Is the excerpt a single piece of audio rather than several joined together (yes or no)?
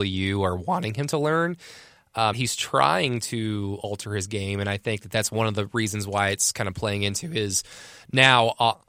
no